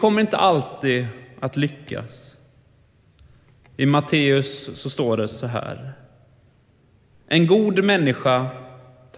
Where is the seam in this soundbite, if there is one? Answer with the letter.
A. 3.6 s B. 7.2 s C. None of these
A